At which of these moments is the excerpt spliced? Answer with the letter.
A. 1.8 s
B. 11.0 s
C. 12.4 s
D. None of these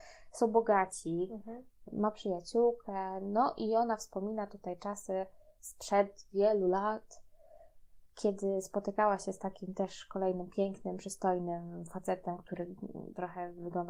D